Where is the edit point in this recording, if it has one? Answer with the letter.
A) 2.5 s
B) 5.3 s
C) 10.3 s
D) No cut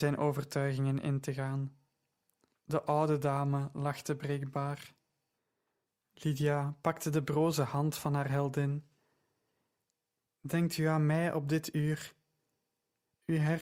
A